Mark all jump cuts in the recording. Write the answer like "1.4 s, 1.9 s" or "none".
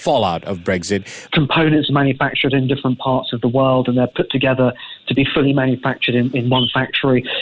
1.3 s